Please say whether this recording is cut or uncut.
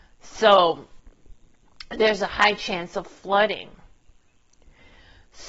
uncut